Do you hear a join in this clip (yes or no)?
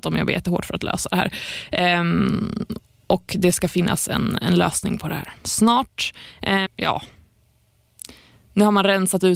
yes